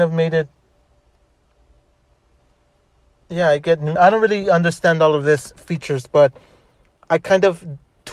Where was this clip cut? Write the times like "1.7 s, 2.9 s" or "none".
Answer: 4.0 s